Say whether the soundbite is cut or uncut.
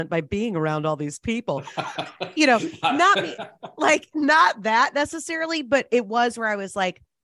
uncut